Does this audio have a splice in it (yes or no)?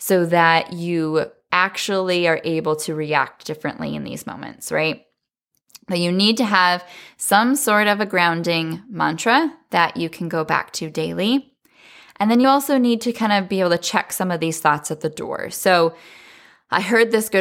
no